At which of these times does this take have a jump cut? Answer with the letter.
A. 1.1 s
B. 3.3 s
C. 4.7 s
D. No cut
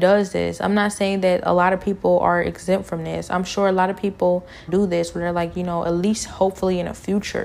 C